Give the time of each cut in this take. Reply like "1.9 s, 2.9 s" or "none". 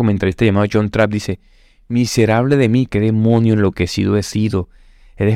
2.9 s